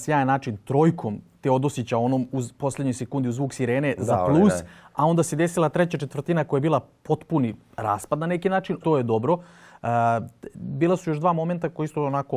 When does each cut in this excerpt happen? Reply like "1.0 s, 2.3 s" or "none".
8.8 s